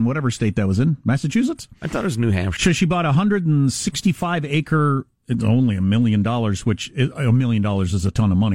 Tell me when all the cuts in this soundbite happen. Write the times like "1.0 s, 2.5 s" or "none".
2.6 s